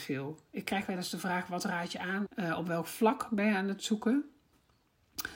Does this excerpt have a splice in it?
yes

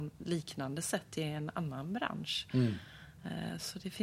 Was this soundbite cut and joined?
no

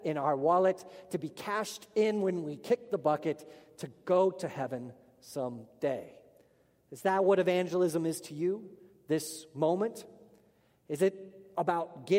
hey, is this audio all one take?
yes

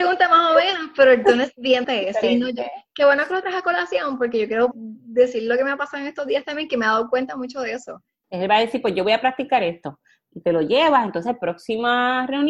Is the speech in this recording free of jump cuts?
no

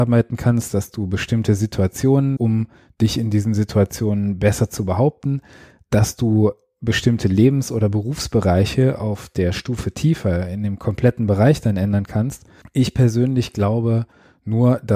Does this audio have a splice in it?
yes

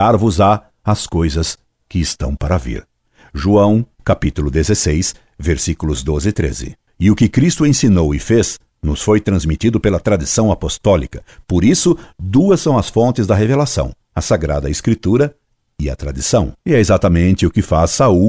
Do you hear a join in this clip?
yes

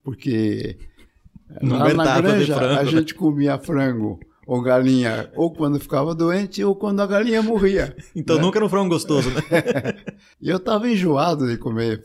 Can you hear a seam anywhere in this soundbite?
no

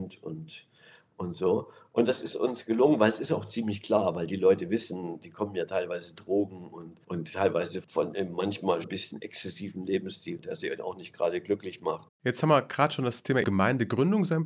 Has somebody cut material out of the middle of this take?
yes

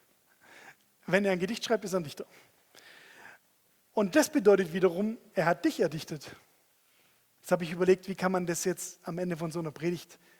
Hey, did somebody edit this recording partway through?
yes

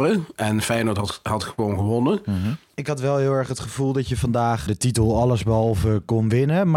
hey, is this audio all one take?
no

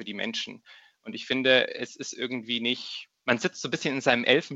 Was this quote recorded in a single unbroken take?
no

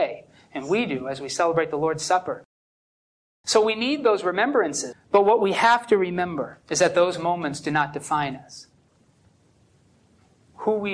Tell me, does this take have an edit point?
yes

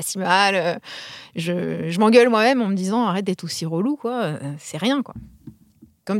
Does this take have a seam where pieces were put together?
no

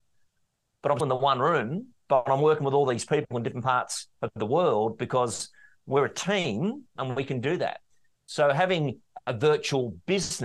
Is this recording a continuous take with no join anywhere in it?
no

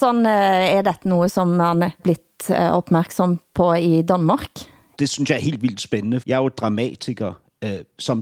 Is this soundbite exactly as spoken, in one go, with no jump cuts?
no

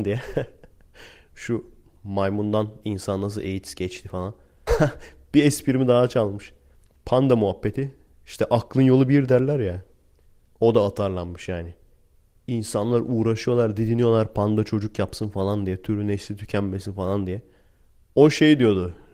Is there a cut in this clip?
yes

